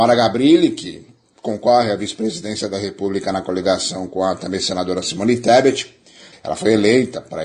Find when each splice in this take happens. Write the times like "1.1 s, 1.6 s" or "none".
6.3 s